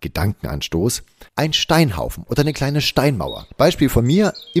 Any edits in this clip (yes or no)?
yes